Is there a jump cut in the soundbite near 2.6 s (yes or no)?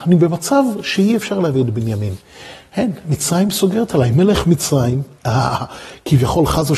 no